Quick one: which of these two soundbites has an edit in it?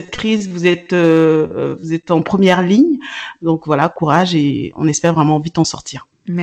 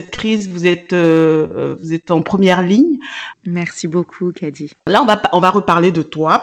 second; 2 cuts; at 3.3 s, 4.7 s

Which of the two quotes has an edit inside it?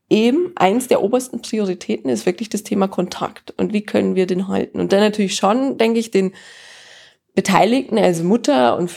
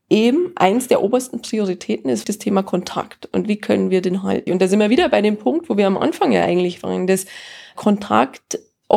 second; 2 cuts; at 2.2 s, 4.5 s

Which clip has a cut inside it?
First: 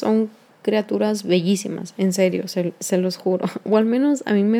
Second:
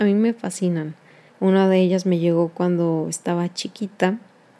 second; 1 cut; at 1.3 s

